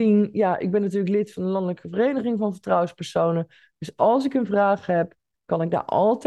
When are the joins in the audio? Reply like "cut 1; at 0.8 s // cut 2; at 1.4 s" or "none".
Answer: cut 1; at 5.3 s